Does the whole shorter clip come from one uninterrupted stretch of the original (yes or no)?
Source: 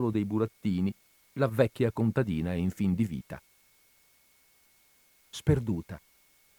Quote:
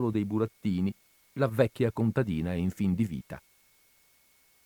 yes